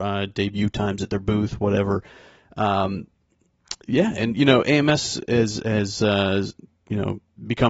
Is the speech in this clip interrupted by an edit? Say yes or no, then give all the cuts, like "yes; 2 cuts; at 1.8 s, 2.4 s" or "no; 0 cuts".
no; 0 cuts